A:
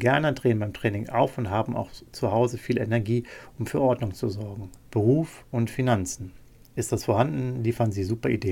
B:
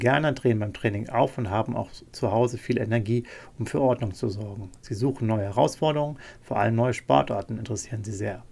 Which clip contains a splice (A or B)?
A